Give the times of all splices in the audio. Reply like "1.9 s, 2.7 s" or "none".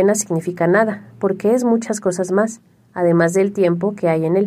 none